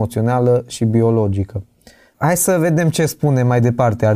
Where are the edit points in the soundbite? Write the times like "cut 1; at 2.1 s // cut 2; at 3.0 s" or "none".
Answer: cut 1; at 2.1 s